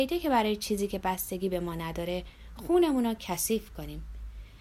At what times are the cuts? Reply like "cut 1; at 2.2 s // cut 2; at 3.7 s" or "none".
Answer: none